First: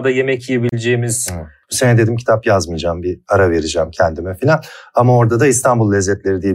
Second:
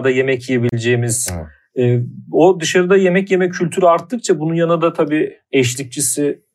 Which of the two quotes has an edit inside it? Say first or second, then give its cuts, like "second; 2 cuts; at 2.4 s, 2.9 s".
first; 1 cut; at 1.6 s